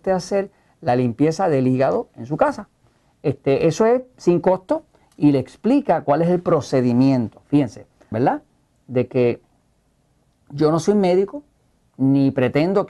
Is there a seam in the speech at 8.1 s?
yes; 1 cut; at 8.1 s

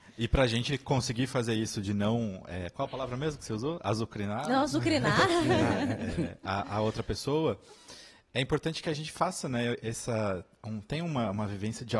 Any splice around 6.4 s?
no; 0 cuts

